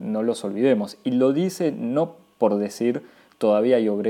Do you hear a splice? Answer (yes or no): no